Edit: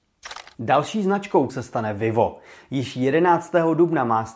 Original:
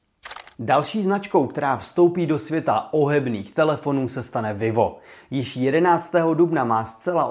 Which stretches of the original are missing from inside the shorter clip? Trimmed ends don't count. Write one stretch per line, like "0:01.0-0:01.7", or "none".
0:01.5-0:04.1